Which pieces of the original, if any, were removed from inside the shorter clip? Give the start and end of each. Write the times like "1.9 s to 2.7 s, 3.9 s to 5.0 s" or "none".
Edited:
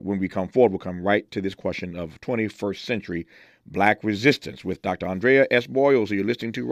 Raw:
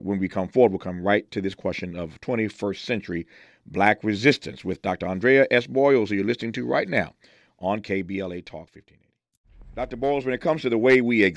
none